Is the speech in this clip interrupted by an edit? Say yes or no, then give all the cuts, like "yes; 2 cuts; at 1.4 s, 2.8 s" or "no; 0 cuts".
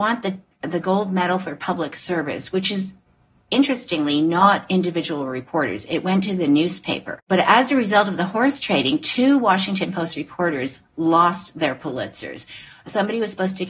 no; 0 cuts